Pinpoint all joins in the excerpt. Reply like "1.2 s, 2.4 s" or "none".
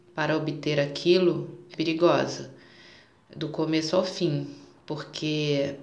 1.7 s